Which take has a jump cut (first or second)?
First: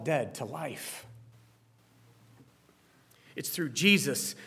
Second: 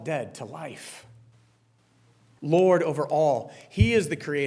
second